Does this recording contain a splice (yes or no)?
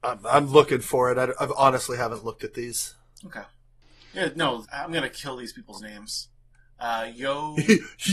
yes